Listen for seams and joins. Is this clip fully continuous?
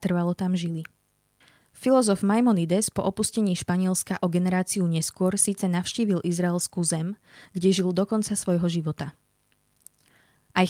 no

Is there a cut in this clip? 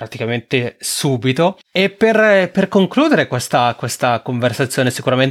no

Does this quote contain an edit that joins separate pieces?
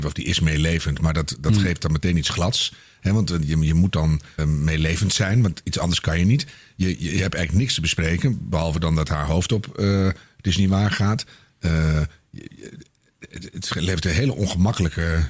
yes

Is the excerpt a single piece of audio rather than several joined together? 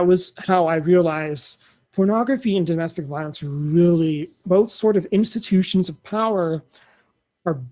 no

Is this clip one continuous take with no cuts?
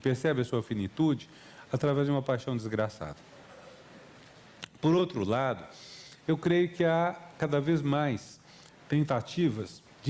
yes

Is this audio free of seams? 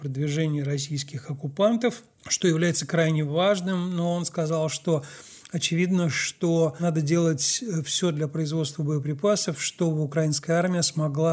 yes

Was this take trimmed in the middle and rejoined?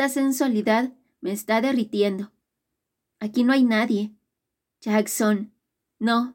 no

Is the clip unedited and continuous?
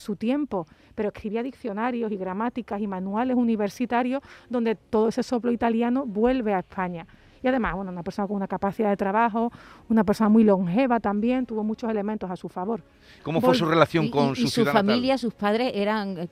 no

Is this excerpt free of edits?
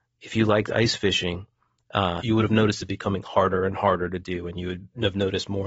no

